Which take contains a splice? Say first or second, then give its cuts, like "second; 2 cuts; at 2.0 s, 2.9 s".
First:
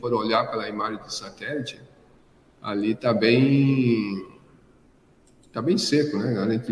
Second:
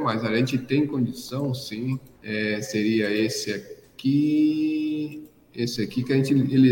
second; 1 cut; at 2.1 s